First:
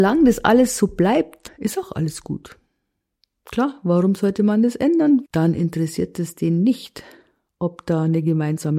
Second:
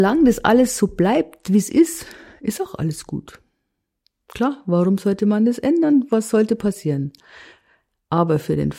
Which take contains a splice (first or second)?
first